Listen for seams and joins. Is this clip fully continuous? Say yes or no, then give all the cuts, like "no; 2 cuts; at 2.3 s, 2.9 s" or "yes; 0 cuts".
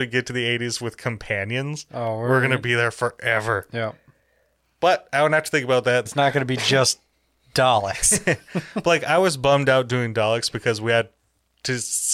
no; 1 cut; at 6.1 s